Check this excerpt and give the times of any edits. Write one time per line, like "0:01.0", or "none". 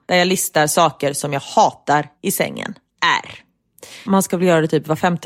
0:04.1